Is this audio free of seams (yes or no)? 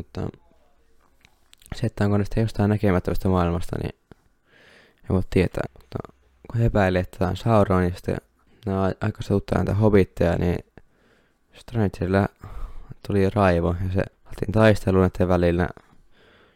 no